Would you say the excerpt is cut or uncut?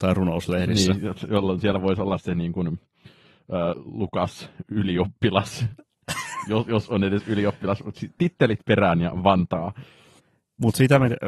cut